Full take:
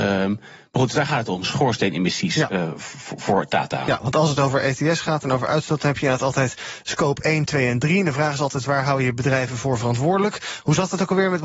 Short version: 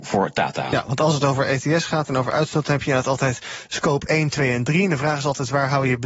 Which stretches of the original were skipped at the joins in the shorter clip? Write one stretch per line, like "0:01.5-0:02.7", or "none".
none